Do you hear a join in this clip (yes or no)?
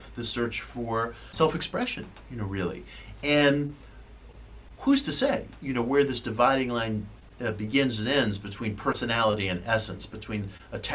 no